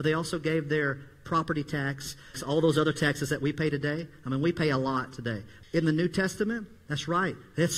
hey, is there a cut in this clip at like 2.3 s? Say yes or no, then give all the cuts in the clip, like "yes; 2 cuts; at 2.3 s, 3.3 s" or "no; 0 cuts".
yes; 2 cuts; at 2.3 s, 5.6 s